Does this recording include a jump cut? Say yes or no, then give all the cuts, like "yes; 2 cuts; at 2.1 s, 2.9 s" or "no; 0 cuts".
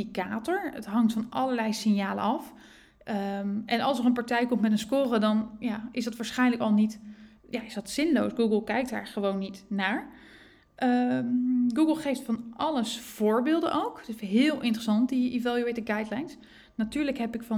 no; 0 cuts